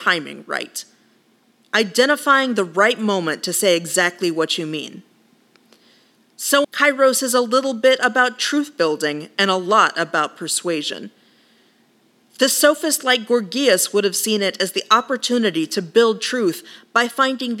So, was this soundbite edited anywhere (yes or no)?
yes